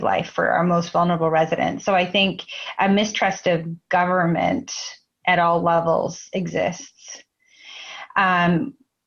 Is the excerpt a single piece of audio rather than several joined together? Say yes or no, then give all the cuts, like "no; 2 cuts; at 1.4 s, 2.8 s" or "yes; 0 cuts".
yes; 0 cuts